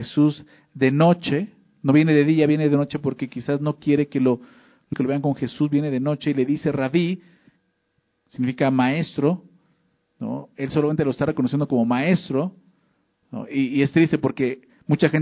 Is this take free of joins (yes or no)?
no